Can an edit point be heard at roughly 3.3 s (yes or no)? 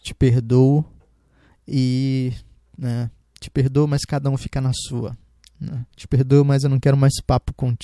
no